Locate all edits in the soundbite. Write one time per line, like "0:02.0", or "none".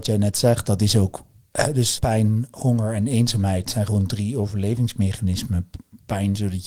0:02.0